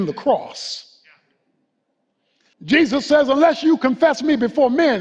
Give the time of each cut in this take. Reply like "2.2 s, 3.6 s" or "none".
2.5 s